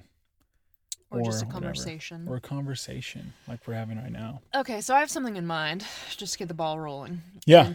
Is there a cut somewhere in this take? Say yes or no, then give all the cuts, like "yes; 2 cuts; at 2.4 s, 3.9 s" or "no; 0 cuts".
no; 0 cuts